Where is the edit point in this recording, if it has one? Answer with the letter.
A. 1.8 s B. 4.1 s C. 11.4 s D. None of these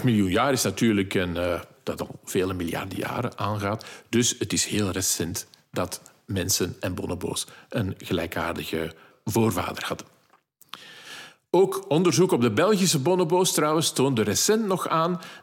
A